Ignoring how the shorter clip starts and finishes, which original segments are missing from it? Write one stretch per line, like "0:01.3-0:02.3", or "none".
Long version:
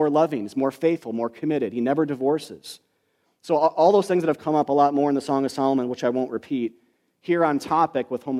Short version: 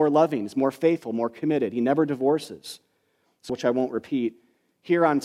0:03.5-0:05.9